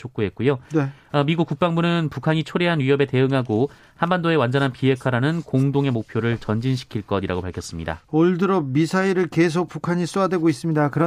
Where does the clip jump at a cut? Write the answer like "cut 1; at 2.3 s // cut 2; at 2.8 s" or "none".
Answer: none

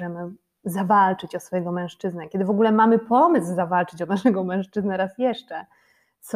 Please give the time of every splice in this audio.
none

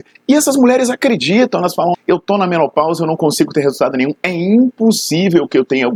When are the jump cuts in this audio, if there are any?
cut 1; at 1.9 s

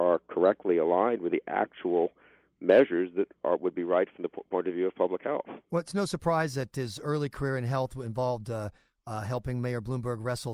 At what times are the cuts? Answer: none

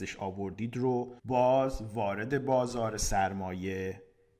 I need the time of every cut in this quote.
cut 1; at 1.2 s

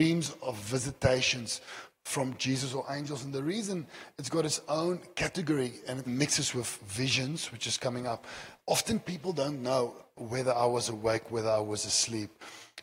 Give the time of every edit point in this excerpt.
cut 1; at 6.1 s

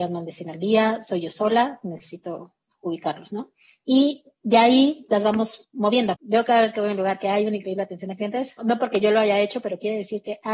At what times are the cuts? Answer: cut 1; at 2.7 s // cut 2; at 6.1 s // cut 3; at 8.6 s

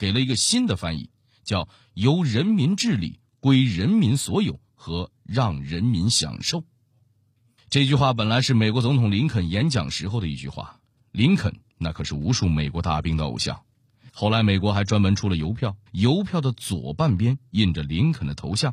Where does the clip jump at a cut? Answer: cut 1; at 14.1 s // cut 2; at 15.9 s

